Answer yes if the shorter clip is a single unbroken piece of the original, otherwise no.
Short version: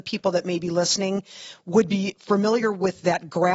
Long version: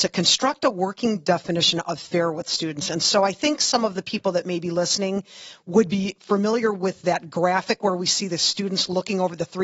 yes